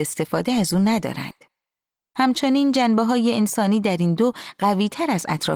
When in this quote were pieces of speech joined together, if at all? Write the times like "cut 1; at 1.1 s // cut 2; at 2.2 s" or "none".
cut 1; at 2.0 s

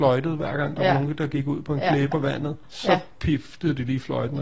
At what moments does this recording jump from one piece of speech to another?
cut 1; at 2.1 s

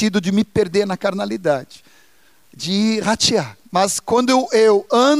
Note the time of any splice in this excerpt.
cut 1; at 3.6 s

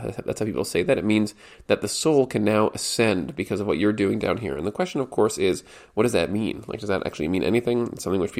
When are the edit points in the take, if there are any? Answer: none

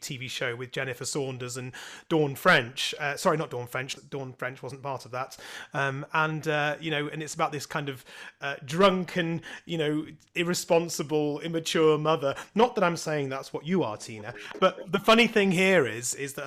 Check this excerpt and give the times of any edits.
cut 1; at 4.0 s

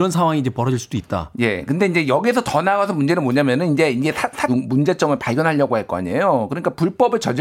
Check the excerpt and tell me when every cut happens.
cut 1; at 4.5 s

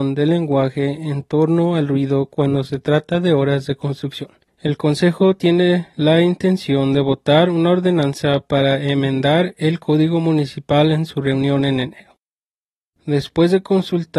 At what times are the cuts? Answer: cut 1; at 13.0 s

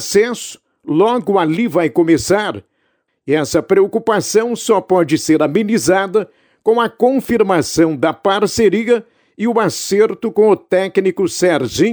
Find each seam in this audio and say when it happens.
cut 1; at 3.1 s

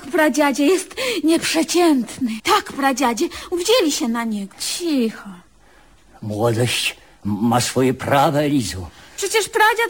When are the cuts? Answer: cut 1; at 2.4 s // cut 2; at 4.5 s

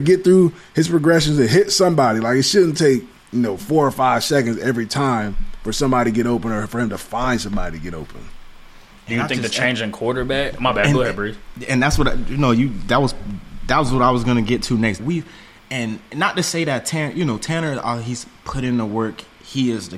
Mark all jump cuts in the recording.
cut 1; at 15.0 s

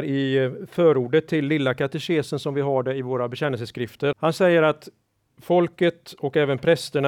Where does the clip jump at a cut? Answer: cut 1; at 4.1 s

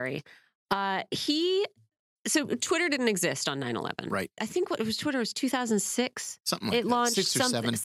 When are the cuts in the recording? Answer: cut 1; at 4.4 s

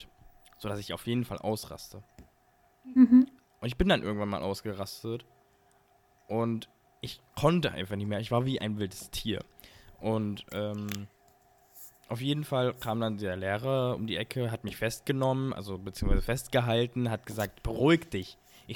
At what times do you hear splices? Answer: none

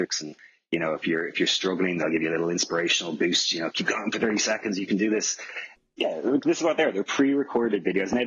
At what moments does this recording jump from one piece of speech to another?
cut 1; at 5.8 s

